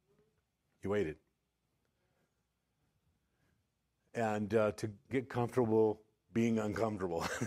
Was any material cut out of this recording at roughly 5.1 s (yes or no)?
yes